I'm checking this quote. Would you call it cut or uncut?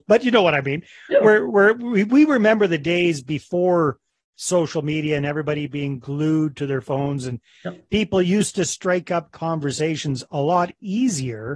uncut